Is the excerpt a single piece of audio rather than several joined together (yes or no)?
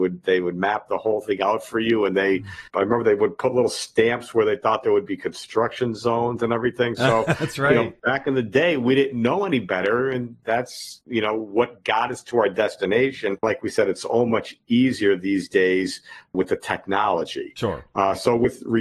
no